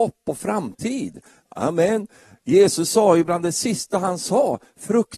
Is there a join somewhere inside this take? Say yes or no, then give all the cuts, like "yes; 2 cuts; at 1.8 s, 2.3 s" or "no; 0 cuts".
no; 0 cuts